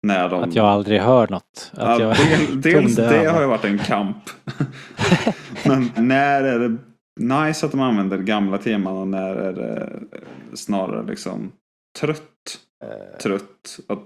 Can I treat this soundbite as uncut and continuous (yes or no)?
no